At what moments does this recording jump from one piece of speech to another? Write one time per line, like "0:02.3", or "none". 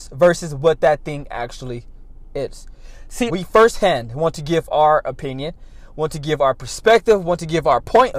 0:03.3

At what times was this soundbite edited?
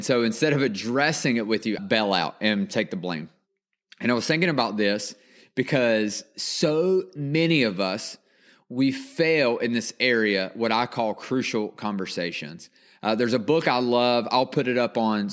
0:01.8

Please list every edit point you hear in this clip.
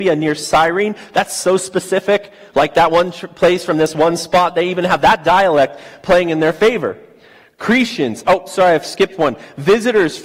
none

